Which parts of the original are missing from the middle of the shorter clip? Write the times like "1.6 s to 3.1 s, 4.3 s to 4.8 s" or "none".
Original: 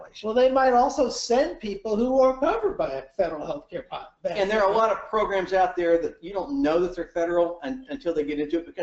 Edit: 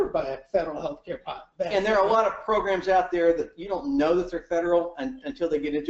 none